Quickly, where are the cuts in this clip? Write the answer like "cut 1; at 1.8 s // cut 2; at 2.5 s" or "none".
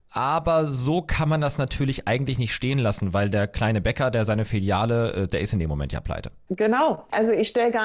cut 1; at 5.3 s